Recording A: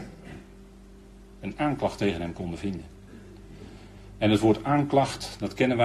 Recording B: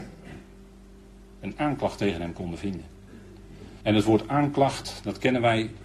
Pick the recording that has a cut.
B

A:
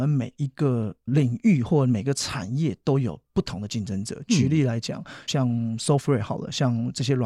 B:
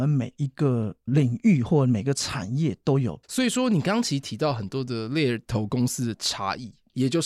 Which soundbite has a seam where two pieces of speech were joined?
B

